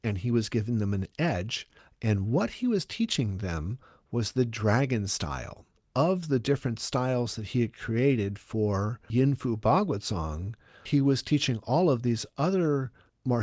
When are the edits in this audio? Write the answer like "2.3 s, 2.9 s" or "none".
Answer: none